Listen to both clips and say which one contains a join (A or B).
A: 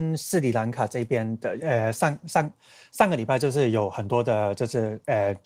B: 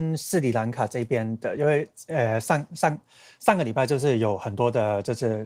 A